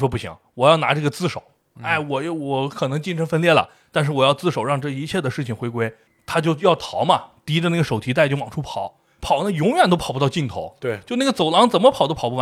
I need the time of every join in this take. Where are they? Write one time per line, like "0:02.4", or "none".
none